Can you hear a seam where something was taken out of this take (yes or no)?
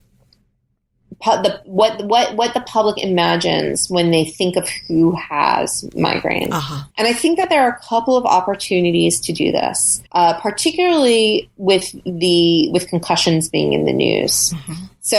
yes